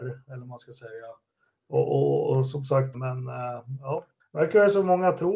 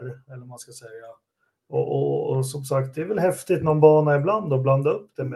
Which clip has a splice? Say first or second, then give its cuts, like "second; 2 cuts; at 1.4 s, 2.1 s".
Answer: first; 2 cuts; at 2.9 s, 4.2 s